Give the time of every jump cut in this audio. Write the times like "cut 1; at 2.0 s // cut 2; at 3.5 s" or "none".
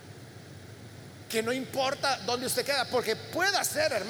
none